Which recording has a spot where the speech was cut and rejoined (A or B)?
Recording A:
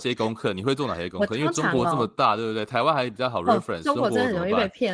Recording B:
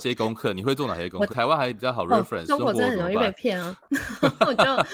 B